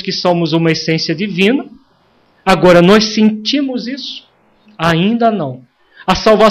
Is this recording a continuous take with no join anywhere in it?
no; 1 cut; at 4.6 s

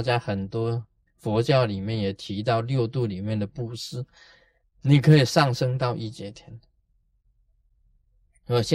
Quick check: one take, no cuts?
no; 2 cuts; at 1.1 s, 4.6 s

